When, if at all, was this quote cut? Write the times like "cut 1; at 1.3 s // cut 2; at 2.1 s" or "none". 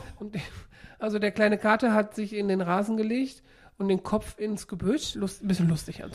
cut 1; at 5.1 s